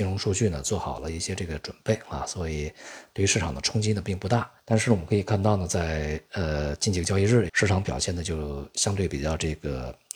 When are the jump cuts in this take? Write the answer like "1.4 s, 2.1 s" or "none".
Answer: 4.6 s, 7.5 s

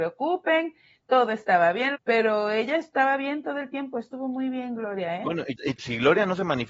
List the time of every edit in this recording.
1.9 s, 5.8 s

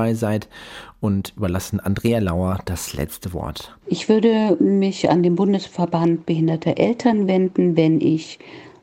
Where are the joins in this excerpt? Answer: 3.8 s

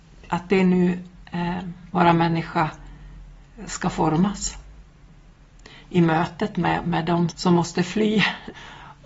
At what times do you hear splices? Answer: 1.9 s, 7.3 s

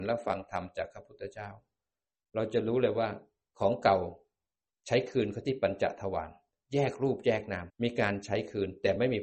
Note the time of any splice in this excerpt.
7.7 s

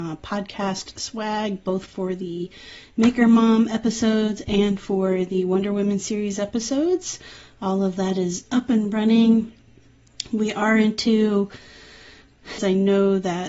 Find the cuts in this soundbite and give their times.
12.6 s

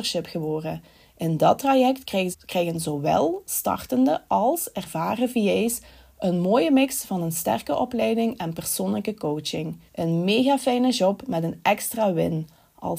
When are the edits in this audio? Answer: 2.3 s, 9.9 s

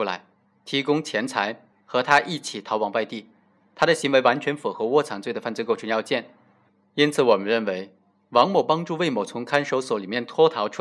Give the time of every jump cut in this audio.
1.7 s

